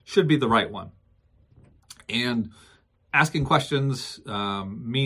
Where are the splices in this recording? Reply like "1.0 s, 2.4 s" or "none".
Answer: none